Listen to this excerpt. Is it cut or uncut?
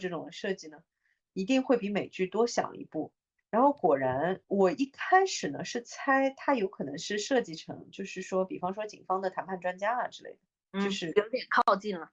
uncut